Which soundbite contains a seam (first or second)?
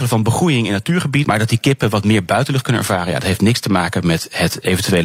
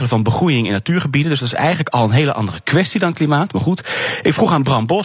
first